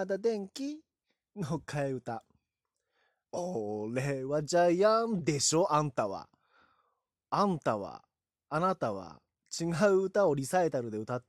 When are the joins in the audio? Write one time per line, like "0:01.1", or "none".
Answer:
0:03.2